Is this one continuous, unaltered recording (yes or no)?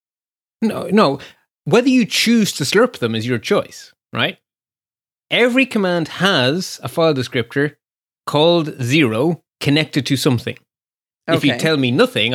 no